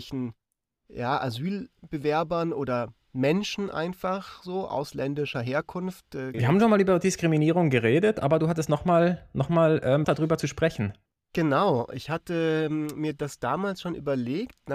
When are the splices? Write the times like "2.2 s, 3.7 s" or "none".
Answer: 6.3 s, 10.0 s

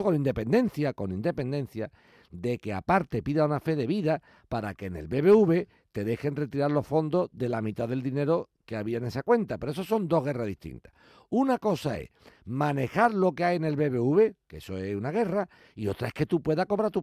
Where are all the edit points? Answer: none

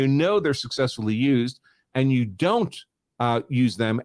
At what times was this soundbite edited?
none

